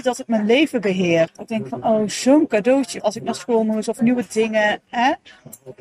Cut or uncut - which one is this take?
cut